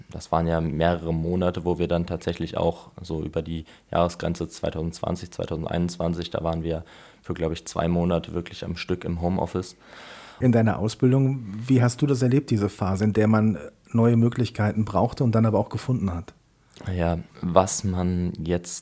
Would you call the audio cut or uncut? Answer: cut